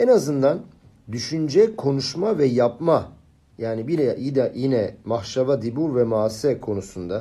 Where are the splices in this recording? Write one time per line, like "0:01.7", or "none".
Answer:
none